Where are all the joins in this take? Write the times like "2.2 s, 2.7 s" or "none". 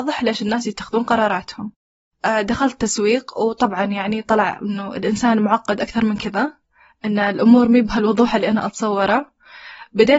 none